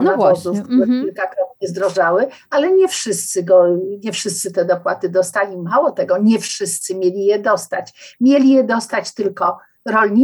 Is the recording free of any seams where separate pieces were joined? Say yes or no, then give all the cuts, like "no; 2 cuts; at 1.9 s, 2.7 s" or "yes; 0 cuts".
yes; 0 cuts